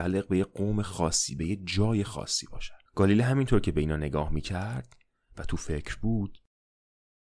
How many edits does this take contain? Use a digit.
1